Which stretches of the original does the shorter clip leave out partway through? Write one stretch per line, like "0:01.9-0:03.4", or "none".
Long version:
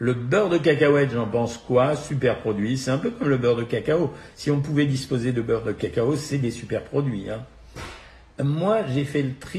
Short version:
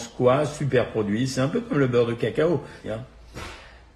0:04.3-0:07.2